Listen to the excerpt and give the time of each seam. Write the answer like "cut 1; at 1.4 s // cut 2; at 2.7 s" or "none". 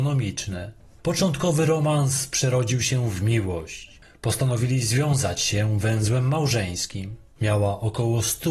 cut 1; at 7.4 s